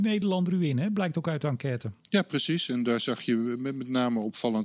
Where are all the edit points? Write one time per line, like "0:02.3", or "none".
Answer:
0:02.0

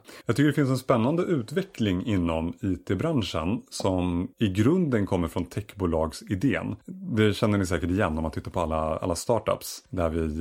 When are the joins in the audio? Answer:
none

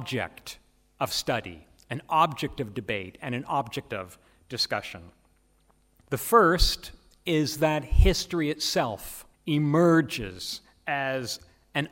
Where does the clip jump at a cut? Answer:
0:06.0
0:09.3

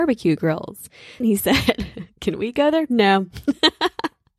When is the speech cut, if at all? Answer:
0:01.2

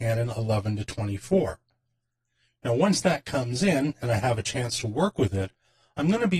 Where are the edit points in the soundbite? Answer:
none

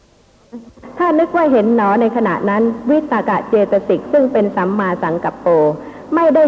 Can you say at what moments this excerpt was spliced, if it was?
0:03.2

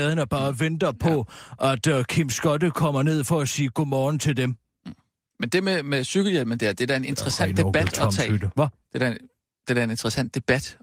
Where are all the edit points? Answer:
none

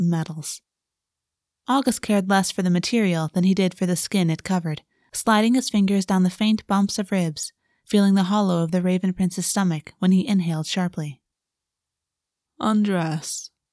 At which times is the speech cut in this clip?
0:12.5

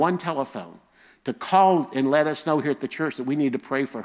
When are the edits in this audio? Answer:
none

